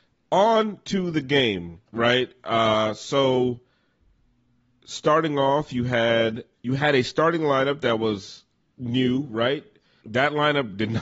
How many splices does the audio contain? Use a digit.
2